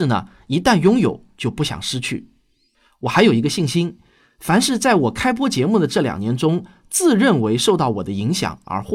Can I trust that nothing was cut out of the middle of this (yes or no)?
yes